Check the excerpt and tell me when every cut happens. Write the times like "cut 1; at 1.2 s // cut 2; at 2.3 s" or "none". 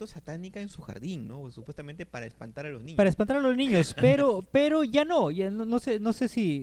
none